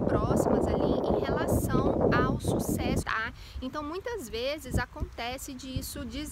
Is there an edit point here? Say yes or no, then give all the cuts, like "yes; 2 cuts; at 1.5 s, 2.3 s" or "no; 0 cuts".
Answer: yes; 1 cut; at 3.0 s